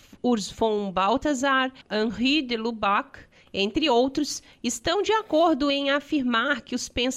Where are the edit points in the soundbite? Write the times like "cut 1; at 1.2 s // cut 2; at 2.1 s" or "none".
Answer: none